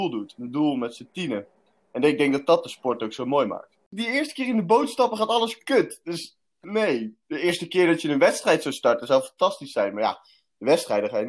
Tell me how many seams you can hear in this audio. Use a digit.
1